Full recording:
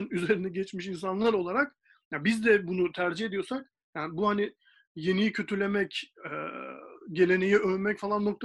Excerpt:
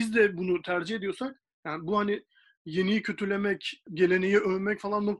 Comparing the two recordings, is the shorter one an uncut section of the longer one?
no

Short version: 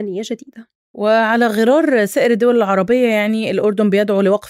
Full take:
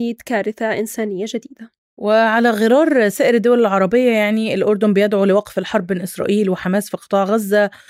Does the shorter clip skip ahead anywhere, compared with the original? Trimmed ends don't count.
no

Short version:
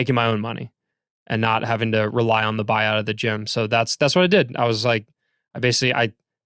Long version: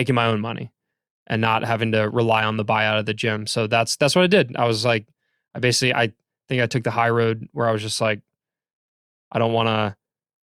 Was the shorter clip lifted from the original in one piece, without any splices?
yes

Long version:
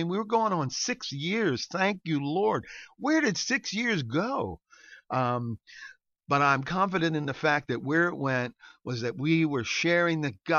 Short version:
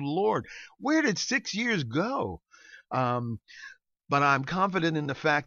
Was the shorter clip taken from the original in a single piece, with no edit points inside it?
yes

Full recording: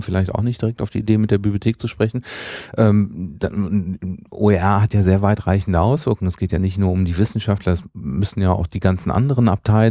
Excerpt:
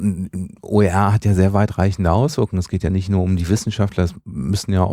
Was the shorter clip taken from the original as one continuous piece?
yes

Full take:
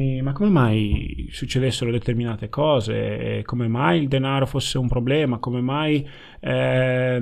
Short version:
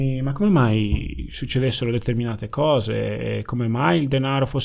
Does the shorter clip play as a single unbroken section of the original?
yes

